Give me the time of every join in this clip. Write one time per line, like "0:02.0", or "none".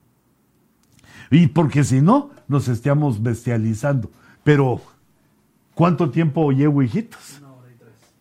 0:04.3